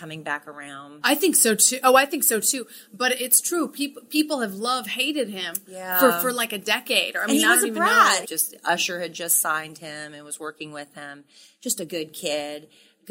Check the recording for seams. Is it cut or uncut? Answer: cut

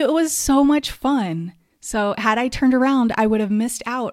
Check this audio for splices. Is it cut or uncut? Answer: uncut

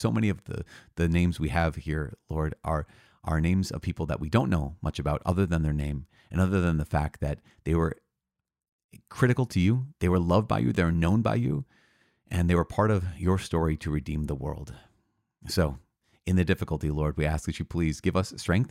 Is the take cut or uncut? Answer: uncut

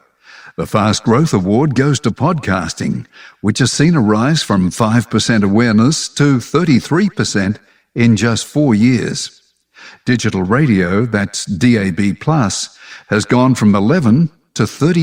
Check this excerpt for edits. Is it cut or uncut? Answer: uncut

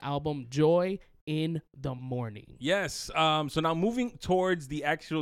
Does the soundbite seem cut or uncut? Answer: uncut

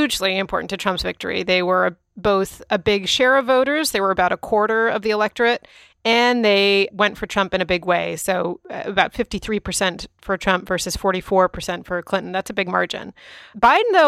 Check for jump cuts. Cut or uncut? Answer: uncut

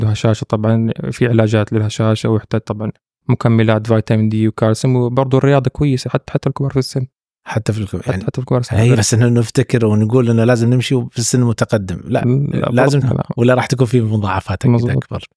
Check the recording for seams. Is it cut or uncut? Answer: cut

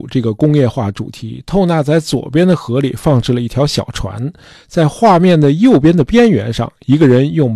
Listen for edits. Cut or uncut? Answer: uncut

